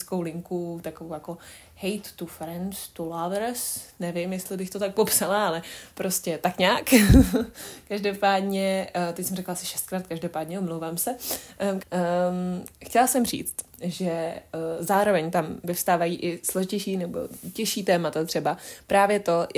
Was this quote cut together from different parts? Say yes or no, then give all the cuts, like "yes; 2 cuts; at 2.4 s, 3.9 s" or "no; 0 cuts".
yes; 1 cut; at 11.8 s